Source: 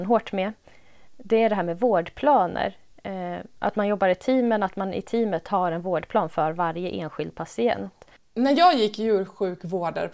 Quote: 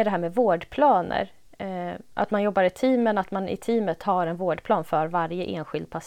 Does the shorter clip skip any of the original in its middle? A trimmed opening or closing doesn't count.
no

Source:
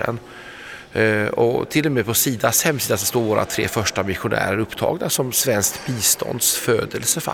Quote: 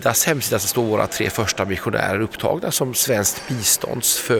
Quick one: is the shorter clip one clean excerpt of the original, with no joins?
yes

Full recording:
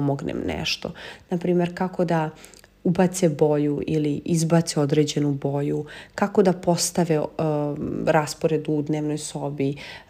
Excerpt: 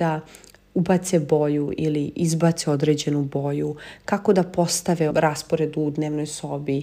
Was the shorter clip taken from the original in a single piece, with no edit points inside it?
no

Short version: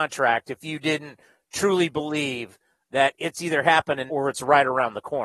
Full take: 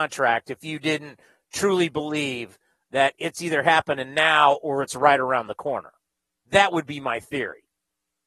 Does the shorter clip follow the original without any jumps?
no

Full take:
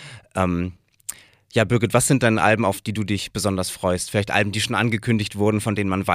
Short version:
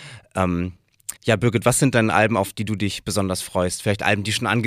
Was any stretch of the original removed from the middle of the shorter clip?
yes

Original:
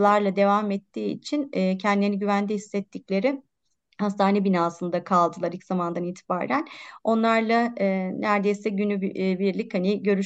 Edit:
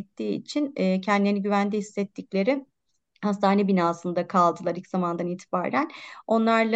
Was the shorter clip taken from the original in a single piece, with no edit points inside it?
yes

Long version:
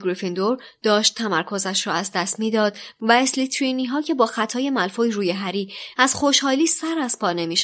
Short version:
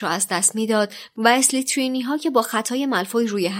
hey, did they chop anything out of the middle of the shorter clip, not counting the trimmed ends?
no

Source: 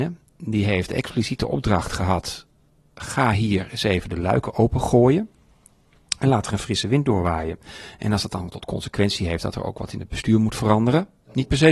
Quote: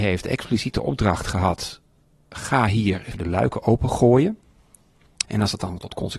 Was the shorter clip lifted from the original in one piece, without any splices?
no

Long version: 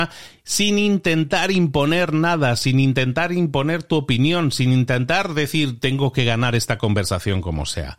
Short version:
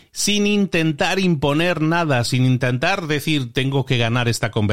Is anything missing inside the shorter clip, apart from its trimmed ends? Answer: yes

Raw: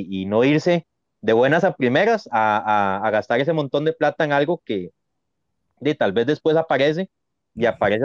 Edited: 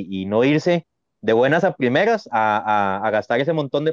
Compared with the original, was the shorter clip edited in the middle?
no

